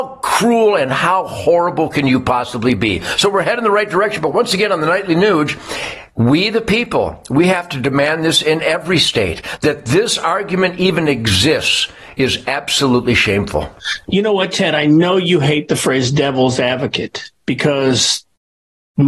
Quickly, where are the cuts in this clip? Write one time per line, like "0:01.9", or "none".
none